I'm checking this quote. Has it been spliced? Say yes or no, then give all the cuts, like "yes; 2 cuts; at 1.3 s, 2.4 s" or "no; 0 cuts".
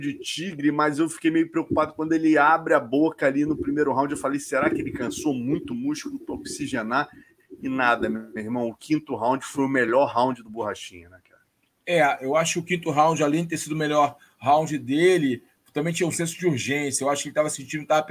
no; 0 cuts